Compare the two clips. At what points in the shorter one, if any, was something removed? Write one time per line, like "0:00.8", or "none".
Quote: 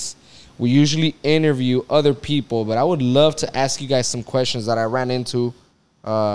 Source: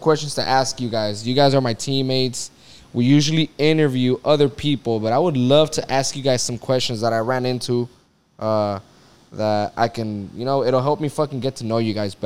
none